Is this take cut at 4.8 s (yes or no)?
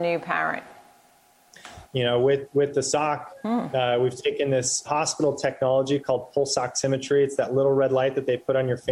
yes